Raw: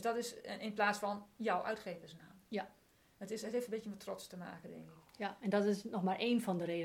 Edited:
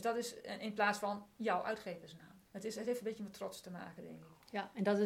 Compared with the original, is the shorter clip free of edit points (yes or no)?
no